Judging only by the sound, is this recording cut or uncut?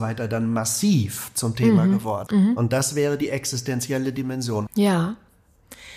cut